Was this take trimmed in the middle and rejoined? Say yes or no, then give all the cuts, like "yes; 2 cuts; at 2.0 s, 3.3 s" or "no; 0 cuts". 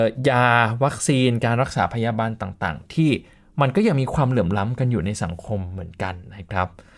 no; 0 cuts